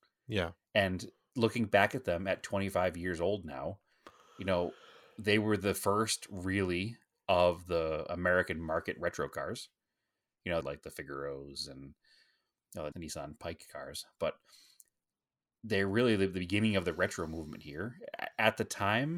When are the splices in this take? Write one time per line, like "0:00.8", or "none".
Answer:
0:10.6
0:12.9